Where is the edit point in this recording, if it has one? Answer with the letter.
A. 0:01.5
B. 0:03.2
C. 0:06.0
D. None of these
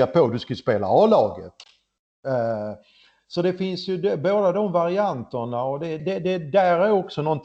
C